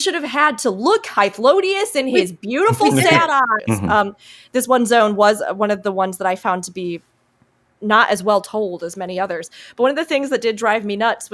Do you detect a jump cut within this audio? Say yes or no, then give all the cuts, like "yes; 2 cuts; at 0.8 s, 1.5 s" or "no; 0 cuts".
yes; 1 cut; at 3.6 s